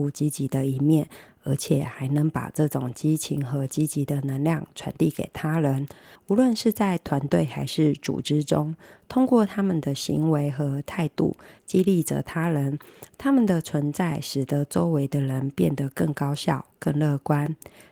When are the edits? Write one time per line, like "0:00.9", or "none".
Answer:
none